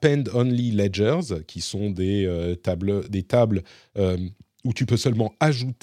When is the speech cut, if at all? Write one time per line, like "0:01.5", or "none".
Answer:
none

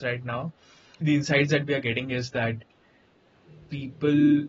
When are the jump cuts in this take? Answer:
0:01.0

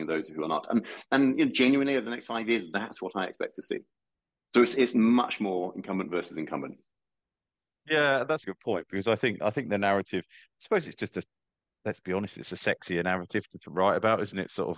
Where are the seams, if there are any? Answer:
0:08.4

